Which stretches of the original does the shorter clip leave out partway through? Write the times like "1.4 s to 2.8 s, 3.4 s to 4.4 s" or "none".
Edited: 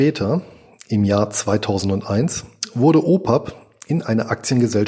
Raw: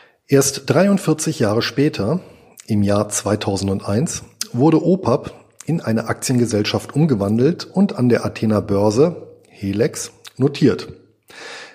none